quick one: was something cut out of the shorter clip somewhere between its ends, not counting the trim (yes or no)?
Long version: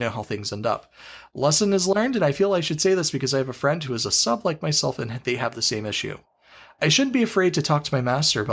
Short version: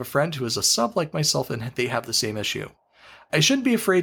no